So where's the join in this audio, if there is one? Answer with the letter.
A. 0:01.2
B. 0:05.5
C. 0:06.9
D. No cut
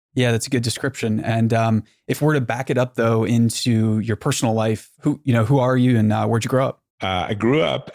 C